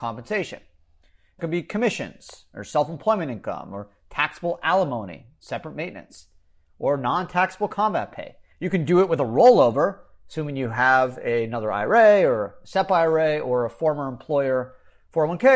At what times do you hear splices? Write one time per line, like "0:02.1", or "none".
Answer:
0:01.4
0:08.5